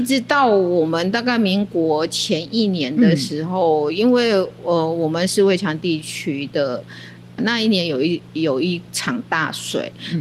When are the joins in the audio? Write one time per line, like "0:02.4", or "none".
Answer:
0:07.4